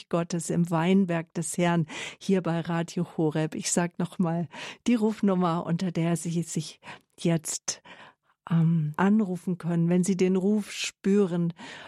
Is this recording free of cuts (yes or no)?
no